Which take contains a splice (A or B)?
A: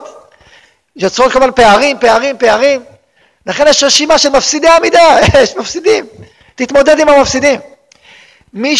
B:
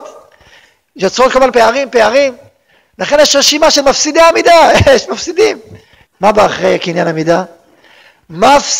B